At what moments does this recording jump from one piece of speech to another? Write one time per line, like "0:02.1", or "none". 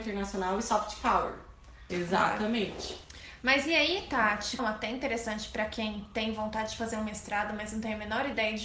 0:01.9
0:04.6